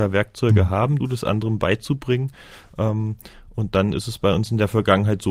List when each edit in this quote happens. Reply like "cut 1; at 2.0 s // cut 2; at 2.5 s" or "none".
cut 1; at 1.0 s